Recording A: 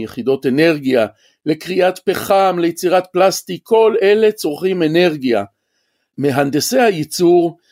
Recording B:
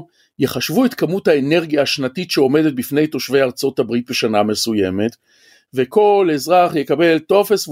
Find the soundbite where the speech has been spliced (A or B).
A